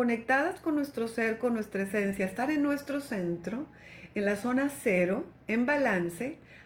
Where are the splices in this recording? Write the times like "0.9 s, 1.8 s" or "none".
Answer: none